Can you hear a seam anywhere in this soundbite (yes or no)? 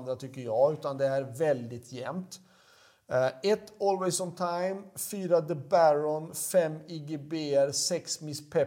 no